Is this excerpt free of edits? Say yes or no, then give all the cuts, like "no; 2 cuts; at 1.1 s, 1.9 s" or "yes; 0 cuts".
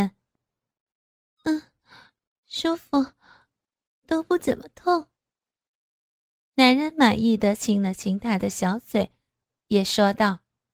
yes; 0 cuts